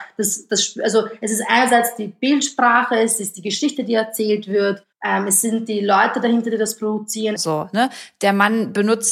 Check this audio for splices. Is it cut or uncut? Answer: cut